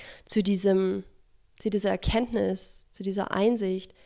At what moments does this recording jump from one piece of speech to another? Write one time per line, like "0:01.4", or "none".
none